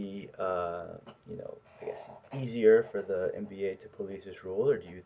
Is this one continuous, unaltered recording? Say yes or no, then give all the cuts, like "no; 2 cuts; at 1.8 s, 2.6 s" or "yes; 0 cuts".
yes; 0 cuts